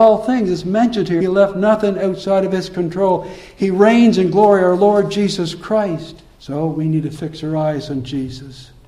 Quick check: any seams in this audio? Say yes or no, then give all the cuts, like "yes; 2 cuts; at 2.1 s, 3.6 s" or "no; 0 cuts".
yes; 2 cuts; at 1.2 s, 6.3 s